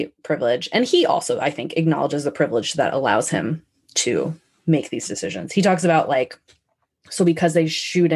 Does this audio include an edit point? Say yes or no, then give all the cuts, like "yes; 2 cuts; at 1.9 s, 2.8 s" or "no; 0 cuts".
no; 0 cuts